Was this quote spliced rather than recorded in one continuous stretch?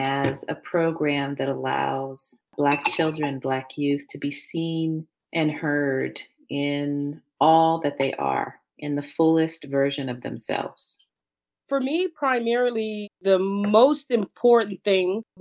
no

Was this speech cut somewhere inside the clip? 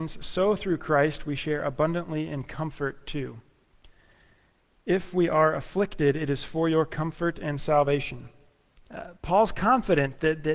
yes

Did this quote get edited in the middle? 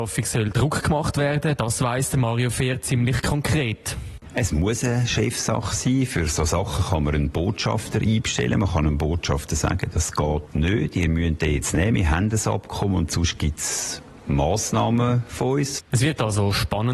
yes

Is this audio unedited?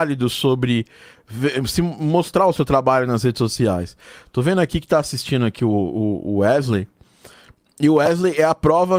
yes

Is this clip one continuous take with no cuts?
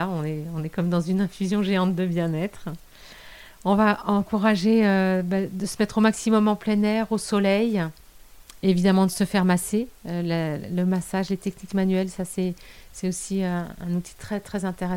yes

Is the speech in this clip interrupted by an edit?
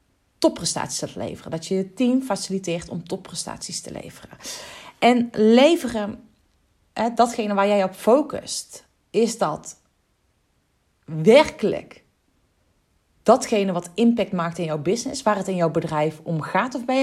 no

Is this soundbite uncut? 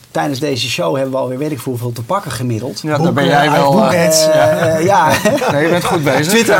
no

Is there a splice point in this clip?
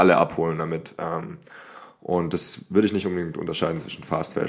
no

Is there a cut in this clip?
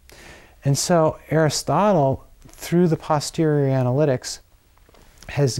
no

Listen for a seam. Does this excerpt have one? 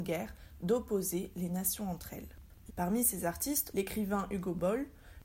yes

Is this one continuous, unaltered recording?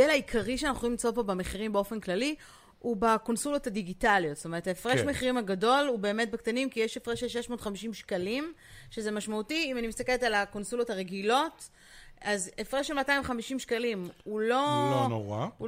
yes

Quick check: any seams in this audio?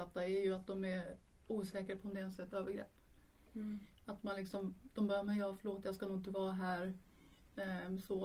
no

